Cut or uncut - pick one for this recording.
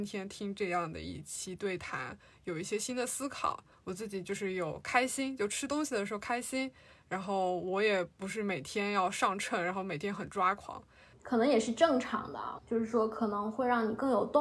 cut